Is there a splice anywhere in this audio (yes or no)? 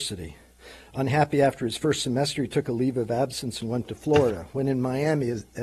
no